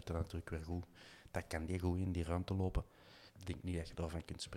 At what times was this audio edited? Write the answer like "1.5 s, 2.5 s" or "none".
3.3 s